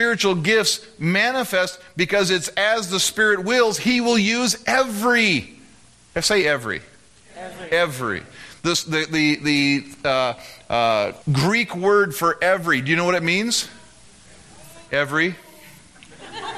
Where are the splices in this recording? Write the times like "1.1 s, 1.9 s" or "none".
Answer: 11.2 s